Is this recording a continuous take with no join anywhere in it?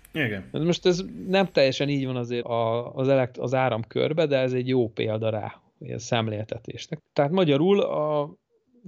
no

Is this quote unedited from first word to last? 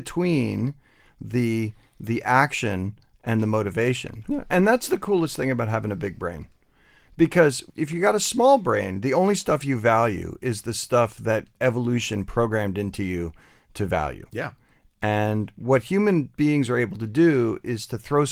no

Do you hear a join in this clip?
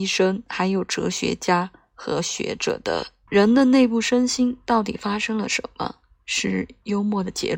yes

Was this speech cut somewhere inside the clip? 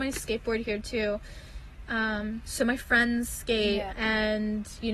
yes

